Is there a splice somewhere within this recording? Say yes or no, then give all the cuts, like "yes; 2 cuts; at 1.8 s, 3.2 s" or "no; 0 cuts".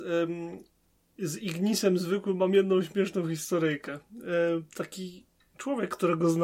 no; 0 cuts